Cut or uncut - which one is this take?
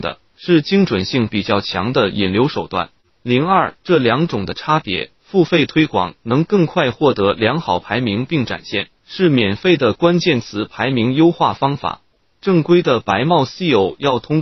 cut